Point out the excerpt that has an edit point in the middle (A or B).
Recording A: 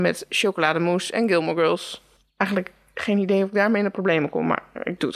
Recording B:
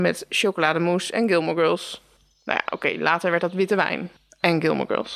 A